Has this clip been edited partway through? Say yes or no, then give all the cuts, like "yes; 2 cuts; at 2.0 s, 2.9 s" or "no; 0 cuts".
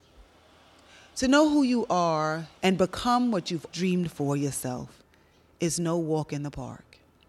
yes; 2 cuts; at 2.6 s, 3.7 s